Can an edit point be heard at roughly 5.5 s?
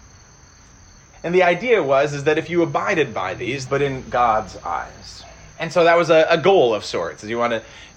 yes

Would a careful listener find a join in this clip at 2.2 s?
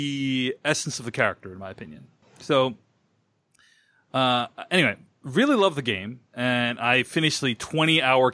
yes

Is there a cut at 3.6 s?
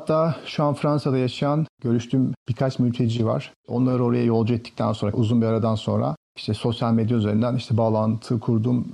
no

